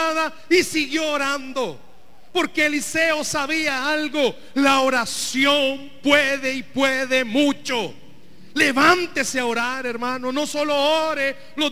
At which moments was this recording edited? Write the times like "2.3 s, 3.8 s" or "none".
none